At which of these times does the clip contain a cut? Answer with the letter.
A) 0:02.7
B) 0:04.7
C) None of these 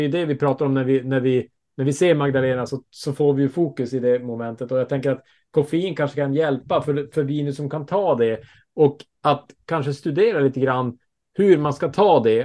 C